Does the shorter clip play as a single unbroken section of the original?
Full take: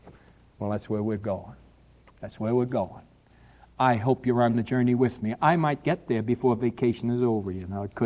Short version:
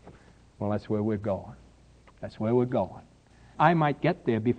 no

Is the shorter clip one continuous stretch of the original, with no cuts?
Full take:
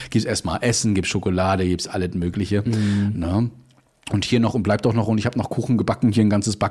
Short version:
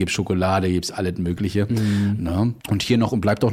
no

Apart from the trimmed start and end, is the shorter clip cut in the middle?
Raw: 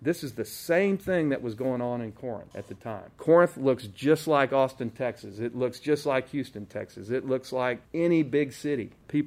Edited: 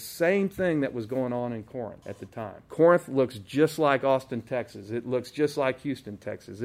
no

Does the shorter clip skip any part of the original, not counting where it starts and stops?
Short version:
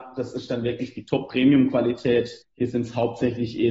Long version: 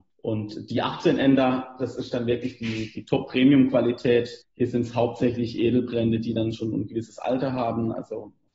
yes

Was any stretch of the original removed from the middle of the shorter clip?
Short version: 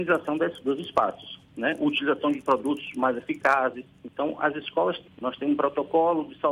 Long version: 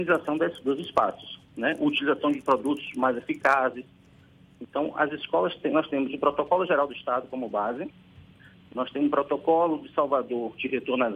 yes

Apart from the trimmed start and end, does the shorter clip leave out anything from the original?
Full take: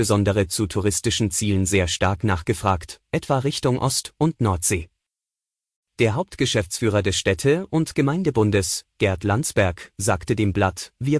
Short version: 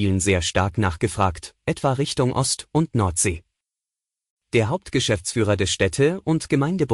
no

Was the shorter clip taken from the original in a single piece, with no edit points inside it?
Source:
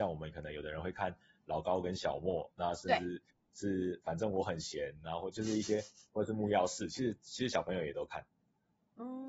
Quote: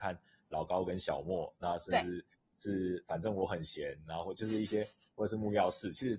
yes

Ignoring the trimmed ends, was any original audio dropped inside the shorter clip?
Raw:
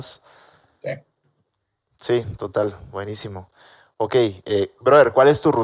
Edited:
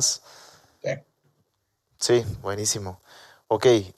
yes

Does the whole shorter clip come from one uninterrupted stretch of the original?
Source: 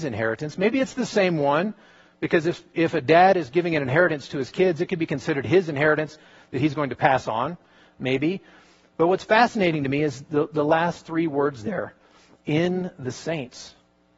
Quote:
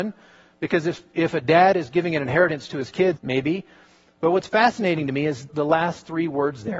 no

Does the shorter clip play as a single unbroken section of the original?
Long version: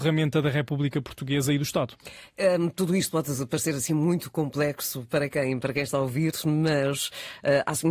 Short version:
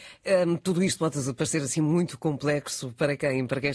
yes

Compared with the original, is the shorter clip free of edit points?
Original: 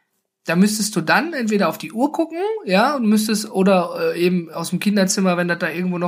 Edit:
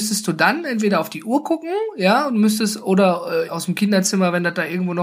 no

